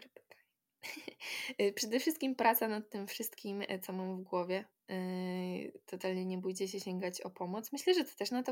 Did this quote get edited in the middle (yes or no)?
no